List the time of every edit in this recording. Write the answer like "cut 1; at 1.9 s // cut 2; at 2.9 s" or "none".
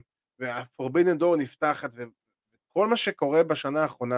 none